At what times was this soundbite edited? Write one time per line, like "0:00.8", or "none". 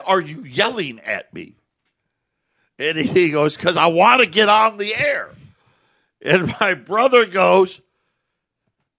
none